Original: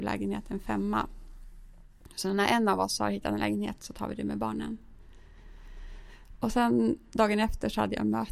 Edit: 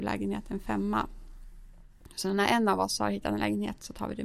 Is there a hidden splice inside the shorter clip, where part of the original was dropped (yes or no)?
no